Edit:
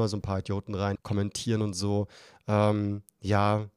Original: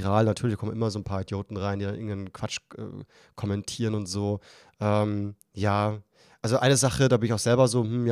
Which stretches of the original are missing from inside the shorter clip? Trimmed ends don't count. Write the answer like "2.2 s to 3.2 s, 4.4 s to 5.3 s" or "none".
1.8 s to 3.3 s